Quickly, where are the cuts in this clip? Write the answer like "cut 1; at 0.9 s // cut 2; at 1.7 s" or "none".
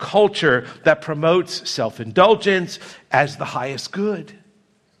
none

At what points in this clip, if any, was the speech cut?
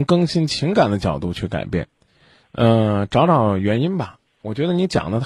cut 1; at 2.4 s

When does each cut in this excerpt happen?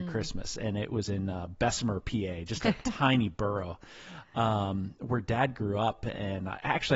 none

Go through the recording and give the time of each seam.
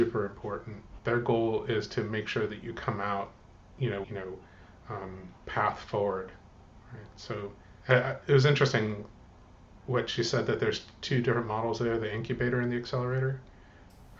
cut 1; at 1.0 s // cut 2; at 4.0 s // cut 3; at 7.8 s

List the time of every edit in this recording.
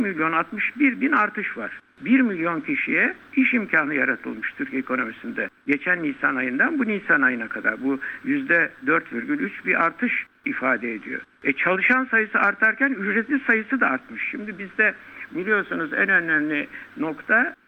none

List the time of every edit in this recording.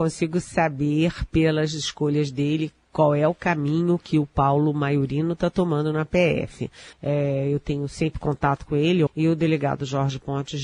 cut 1; at 6.9 s // cut 2; at 9.1 s

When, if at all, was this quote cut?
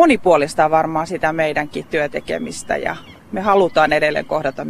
cut 1; at 3.2 s

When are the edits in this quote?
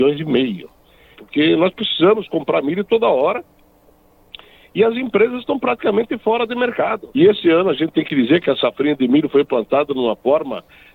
cut 1; at 1.1 s // cut 2; at 7.1 s

